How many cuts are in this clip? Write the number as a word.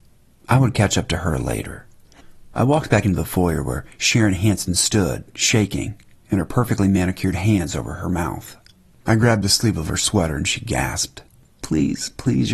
one